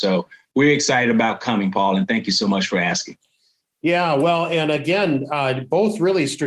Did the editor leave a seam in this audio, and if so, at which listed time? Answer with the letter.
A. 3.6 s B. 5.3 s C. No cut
C